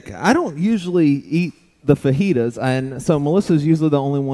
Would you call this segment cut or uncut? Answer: uncut